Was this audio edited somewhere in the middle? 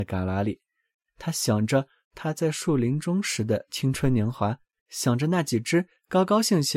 yes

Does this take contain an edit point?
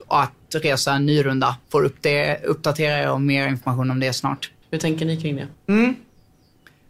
yes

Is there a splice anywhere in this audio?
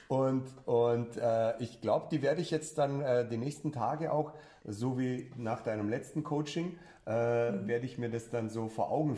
no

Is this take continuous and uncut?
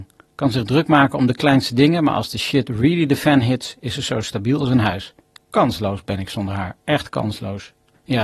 yes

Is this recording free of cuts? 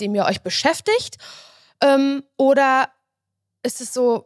yes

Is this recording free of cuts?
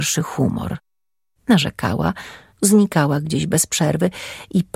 no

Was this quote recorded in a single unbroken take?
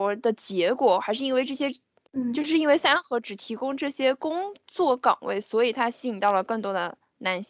yes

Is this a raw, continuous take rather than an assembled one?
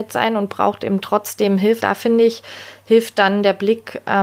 no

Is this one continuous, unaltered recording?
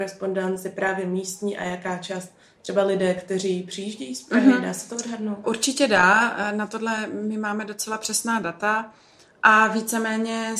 yes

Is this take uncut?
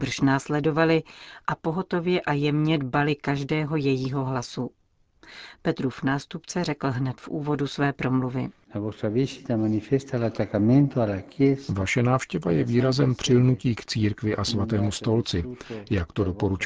yes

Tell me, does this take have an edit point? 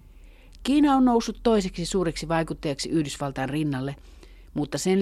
no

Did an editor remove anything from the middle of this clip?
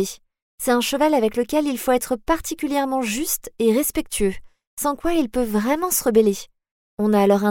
no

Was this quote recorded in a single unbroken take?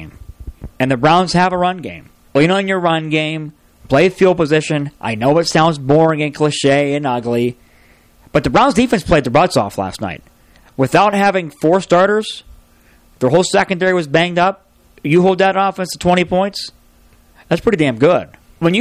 yes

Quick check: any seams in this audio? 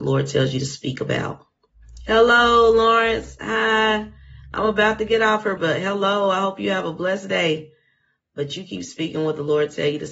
yes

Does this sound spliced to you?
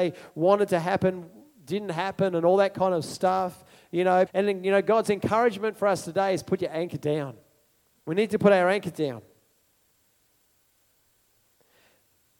yes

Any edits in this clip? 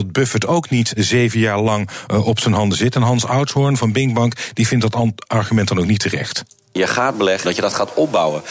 yes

